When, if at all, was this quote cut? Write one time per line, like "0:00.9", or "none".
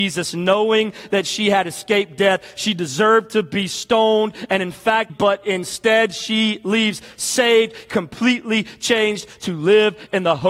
0:05.1